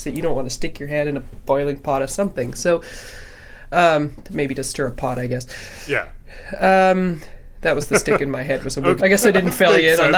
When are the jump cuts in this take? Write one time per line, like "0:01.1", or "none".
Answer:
0:09.0